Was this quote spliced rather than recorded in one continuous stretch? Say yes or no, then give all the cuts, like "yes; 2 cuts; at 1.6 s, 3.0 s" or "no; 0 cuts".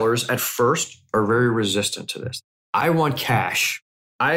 no; 0 cuts